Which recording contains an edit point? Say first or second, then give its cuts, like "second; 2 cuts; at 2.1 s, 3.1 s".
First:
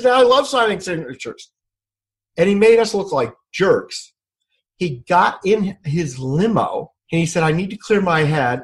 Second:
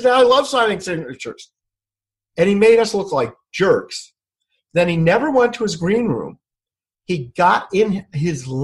first; 2 cuts; at 4.7 s, 7.0 s